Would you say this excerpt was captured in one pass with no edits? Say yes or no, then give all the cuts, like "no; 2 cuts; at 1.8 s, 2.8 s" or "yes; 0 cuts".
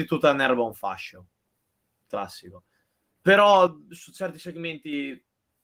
no; 1 cut; at 3.1 s